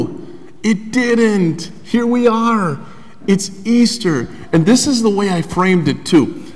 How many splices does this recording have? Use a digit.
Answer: 0